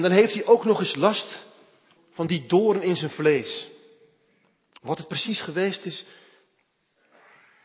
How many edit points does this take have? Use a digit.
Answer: 1